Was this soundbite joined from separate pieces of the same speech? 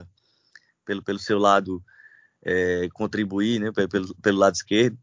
no; 0 cuts

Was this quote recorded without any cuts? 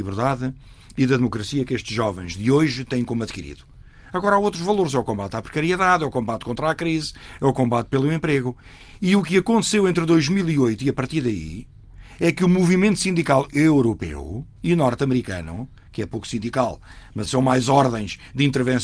no; 1 cut; at 17.3 s

